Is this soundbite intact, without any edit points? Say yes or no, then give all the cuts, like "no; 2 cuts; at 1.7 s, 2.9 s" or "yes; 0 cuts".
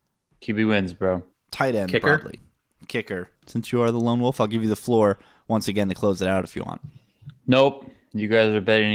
no; 2 cuts; at 1.3 s, 3.3 s